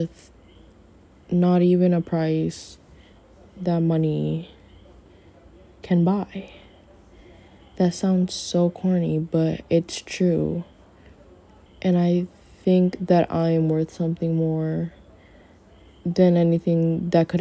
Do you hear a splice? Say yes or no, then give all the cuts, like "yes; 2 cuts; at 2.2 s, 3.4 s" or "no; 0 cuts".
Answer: yes; 1 cut; at 11.7 s